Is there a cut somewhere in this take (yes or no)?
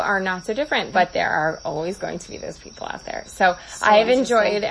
yes